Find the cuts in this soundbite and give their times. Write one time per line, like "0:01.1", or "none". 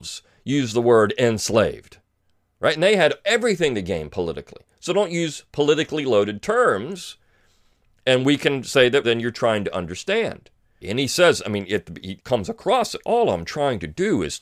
0:09.0
0:10.8
0:12.2